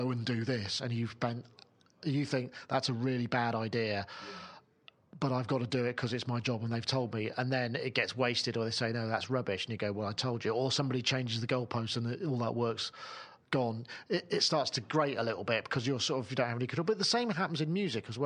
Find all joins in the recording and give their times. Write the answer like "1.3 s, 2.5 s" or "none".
none